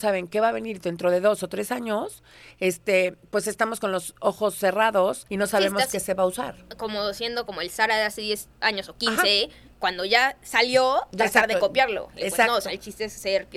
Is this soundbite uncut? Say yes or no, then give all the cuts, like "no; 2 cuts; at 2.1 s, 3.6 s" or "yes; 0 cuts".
yes; 0 cuts